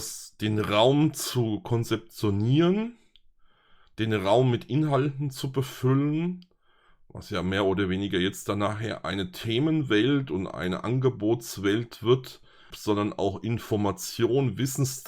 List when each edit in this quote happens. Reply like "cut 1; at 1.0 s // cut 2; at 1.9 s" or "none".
cut 1; at 12.7 s